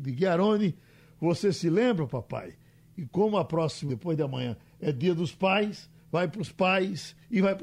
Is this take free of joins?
no; 2 cuts; at 3.9 s, 6.0 s

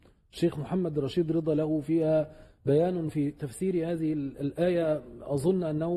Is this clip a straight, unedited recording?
yes; 0 cuts

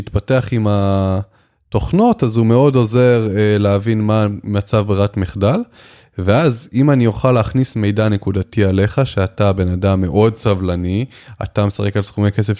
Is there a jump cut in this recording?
no; 0 cuts

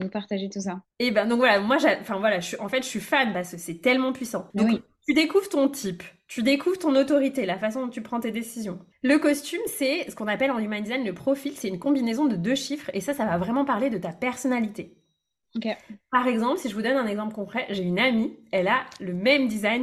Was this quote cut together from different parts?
yes; 3 cuts; at 0.9 s, 4.5 s, 8.9 s

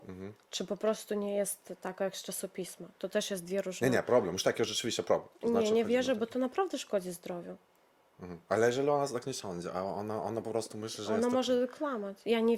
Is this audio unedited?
yes; 0 cuts

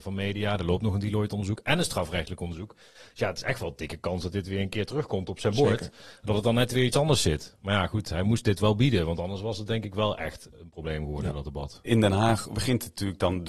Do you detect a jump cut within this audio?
no; 0 cuts

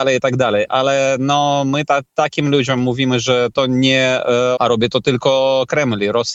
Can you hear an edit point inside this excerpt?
yes; 1 cut; at 4.6 s

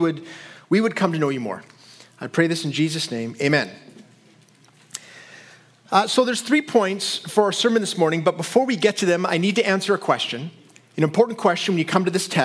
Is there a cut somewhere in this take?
no; 0 cuts

